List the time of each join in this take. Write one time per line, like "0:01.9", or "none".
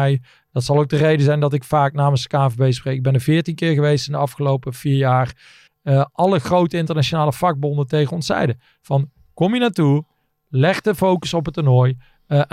0:05.7

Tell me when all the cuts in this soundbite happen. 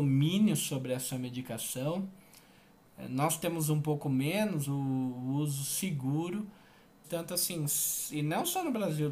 0:04.7
0:07.0

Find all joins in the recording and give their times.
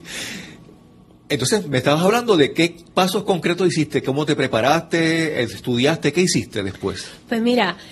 none

